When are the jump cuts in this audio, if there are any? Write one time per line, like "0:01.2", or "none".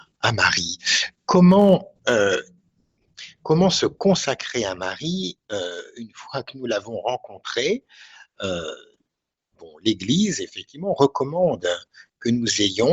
none